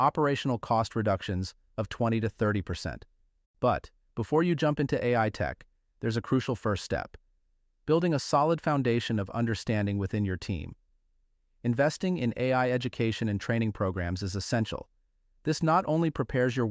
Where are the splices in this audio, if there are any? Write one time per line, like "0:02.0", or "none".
0:03.4